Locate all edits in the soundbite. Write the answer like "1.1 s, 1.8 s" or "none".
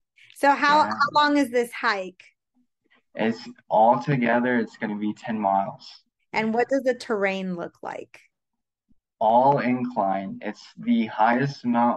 6.2 s